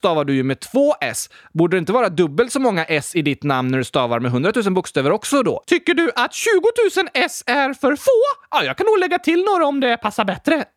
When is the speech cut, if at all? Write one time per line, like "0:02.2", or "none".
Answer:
none

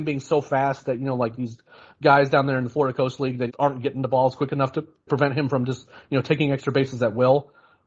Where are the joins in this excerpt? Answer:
0:03.5
0:05.1

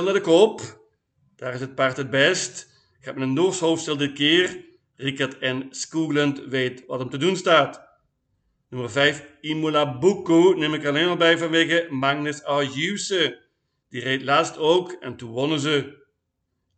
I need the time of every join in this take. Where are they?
none

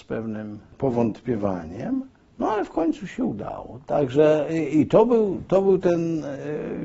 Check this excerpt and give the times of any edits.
none

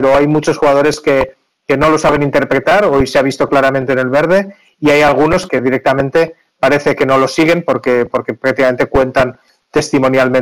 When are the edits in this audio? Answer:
0:05.5

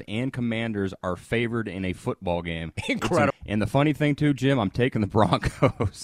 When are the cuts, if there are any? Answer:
0:03.3

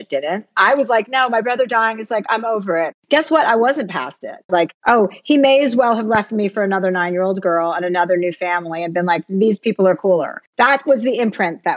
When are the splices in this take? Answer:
0:03.0
0:04.5

